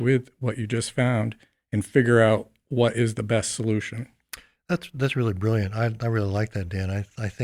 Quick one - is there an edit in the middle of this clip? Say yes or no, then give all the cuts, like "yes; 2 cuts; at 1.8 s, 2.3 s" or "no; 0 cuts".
no; 0 cuts